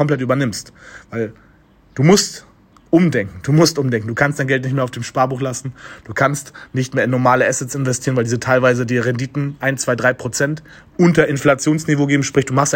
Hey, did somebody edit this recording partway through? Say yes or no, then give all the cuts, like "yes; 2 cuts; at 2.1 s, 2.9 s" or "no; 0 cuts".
no; 0 cuts